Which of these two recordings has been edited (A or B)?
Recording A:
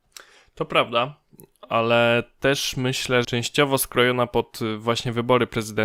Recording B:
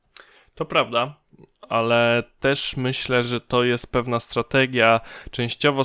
A